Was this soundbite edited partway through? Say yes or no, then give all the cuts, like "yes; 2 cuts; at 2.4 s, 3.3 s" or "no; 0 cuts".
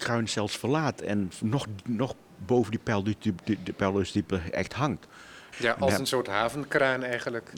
yes; 1 cut; at 5.5 s